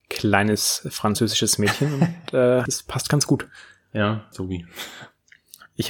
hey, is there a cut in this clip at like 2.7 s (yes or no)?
yes